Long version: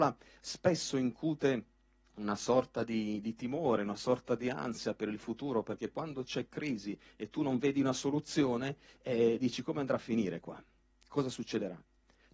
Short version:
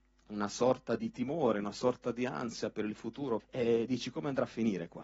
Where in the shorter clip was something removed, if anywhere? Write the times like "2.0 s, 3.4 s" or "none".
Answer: 1.0 s, 3.4 s